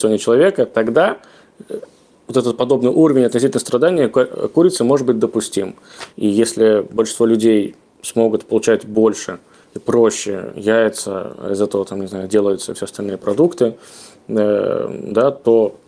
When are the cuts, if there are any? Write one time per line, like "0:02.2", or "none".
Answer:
0:06.1